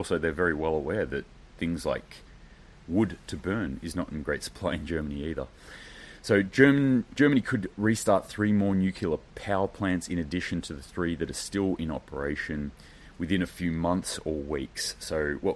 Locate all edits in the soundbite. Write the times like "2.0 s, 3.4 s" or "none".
none